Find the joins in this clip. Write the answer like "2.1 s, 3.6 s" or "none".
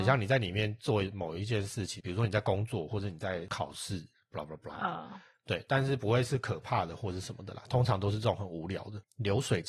2.0 s

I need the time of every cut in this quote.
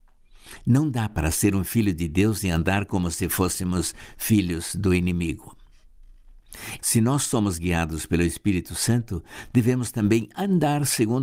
6.8 s

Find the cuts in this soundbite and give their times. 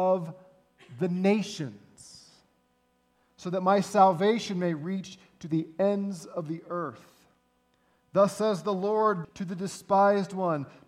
9.2 s

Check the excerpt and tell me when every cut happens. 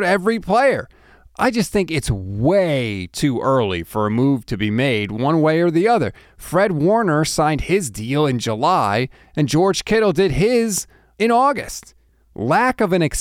6.3 s

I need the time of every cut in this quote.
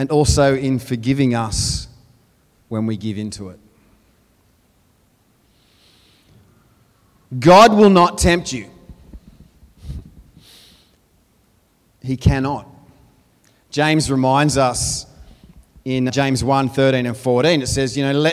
16.1 s

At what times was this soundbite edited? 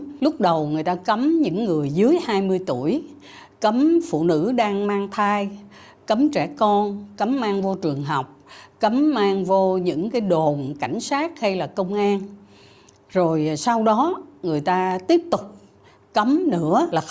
none

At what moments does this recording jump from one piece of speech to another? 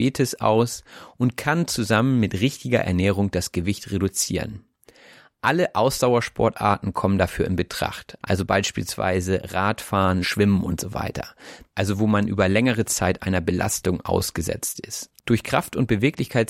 10.2 s, 15.2 s

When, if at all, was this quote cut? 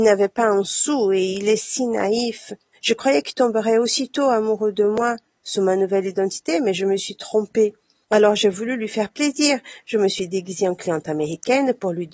2.7 s, 8.0 s

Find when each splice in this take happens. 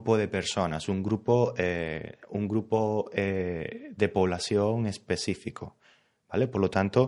none

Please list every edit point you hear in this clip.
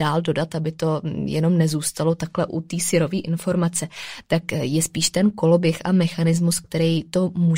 2.5 s

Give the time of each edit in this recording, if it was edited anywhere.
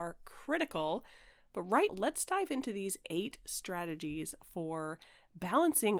1.9 s

